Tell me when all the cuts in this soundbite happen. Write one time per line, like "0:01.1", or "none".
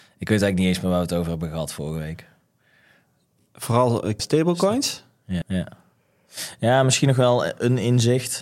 0:04.2
0:05.4